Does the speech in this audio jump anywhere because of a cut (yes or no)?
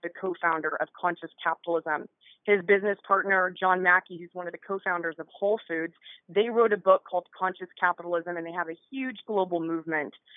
no